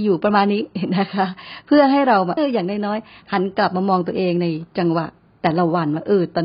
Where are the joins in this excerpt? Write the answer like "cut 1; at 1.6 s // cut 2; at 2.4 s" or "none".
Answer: cut 1; at 2.4 s

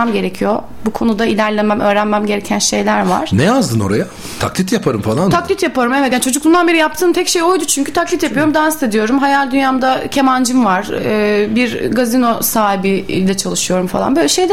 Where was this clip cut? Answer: none

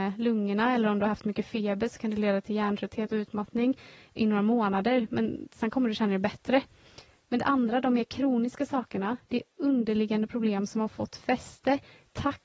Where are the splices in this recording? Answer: none

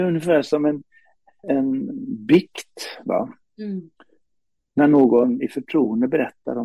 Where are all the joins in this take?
cut 1; at 1.4 s

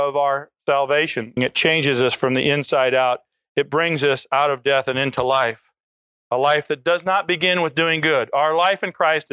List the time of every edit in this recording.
cut 1; at 1.4 s

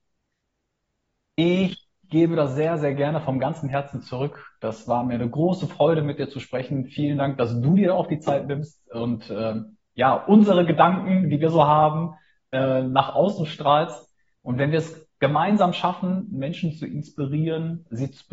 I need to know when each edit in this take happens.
none

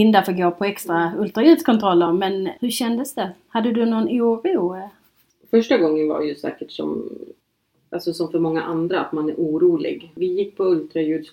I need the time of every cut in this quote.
none

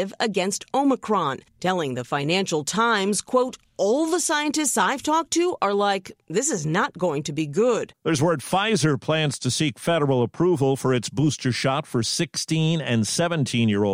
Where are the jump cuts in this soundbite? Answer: none

